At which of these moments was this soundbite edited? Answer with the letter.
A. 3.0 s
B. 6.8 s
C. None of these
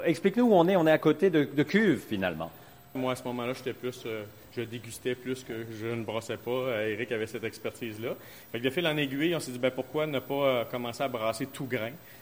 A